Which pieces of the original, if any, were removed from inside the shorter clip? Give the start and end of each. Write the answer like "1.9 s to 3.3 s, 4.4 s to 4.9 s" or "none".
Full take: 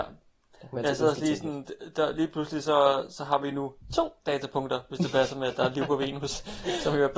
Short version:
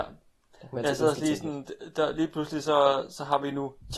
none